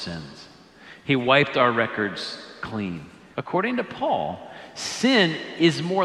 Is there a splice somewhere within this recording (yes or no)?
yes